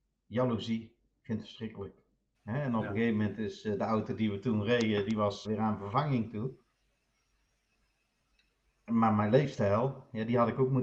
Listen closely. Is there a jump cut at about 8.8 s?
no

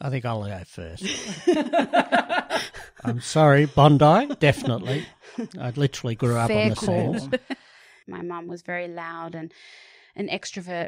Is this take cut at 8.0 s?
yes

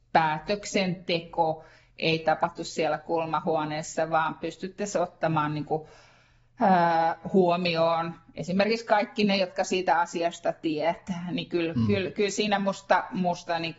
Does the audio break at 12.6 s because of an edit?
no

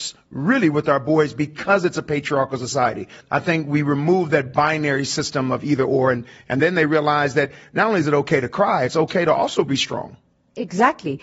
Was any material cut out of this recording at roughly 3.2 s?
yes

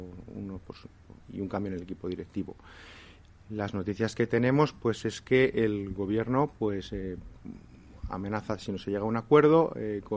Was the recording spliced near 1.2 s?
yes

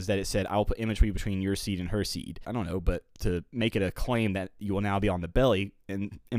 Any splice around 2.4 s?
yes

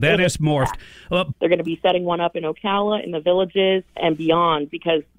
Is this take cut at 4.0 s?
yes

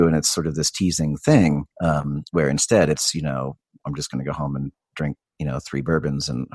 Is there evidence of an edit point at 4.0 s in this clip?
no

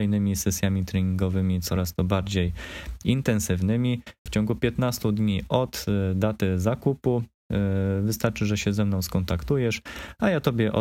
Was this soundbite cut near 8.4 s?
no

